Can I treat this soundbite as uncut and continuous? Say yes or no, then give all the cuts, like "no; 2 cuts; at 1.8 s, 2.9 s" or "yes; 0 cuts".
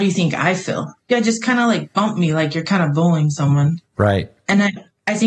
no; 1 cut; at 1.0 s